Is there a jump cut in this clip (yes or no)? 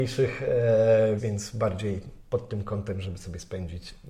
yes